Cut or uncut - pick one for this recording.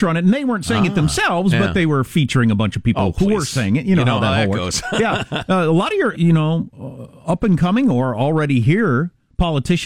cut